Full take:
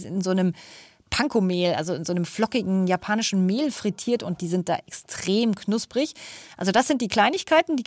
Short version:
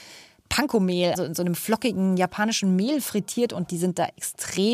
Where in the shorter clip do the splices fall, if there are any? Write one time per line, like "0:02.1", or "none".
0:01.2